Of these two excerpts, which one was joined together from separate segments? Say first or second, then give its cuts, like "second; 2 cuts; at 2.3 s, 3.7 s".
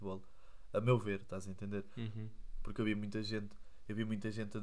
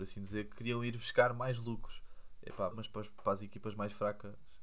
second; 1 cut; at 2.7 s